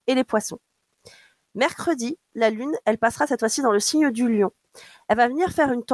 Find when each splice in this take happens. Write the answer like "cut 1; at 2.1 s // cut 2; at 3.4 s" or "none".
none